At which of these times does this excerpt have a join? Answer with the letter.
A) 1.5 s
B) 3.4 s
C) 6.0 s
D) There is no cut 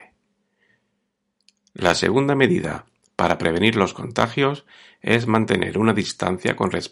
D